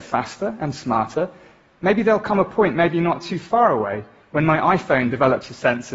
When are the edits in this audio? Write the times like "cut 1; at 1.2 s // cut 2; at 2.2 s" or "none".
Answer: none